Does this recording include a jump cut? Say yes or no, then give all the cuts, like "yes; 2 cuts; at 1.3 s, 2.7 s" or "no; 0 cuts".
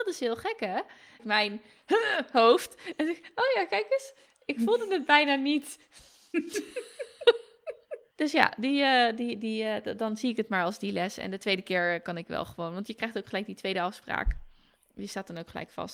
yes; 1 cut; at 1.2 s